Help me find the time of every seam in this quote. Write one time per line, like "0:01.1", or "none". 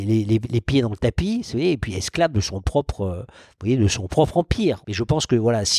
0:04.8